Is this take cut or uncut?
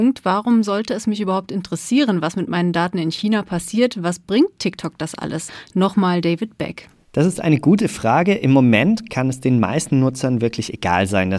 cut